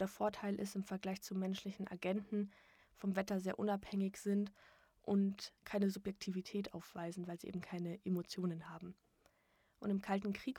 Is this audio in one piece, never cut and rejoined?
no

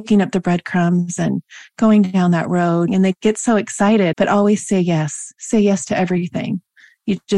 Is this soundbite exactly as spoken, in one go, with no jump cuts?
no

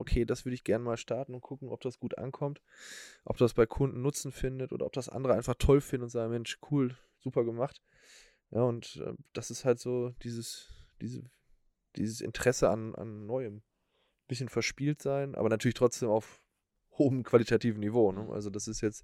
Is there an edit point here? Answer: no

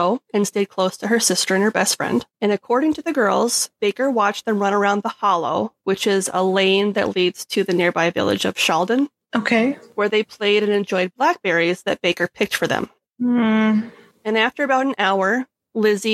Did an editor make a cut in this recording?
no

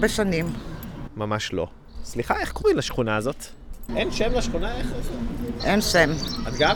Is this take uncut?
no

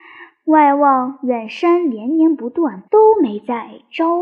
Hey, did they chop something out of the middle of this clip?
yes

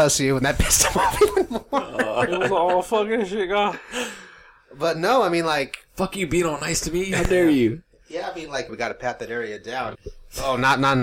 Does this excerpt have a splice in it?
yes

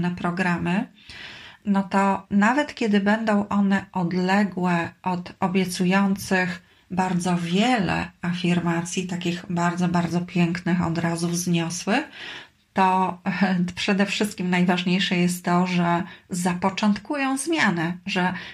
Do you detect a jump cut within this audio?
no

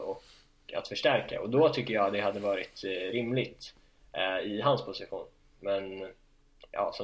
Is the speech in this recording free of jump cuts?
yes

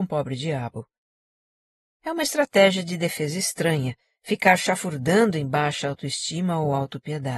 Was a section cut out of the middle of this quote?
no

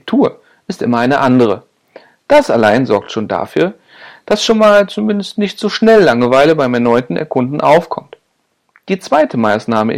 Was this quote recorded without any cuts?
yes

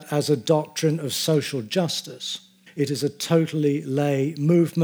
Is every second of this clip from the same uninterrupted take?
no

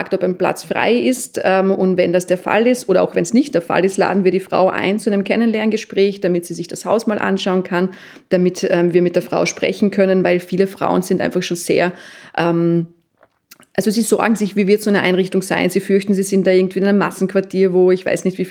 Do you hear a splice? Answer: no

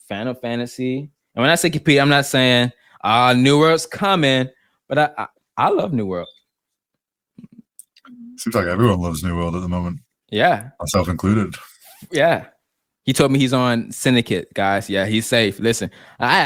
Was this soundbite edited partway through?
no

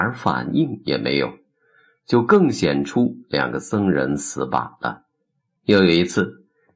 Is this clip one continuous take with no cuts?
no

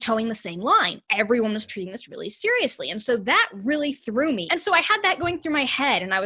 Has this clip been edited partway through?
yes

